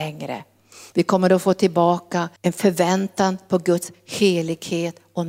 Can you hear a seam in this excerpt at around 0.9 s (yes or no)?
yes